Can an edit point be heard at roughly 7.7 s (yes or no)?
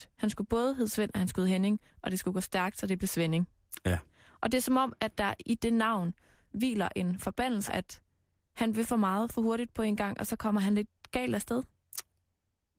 yes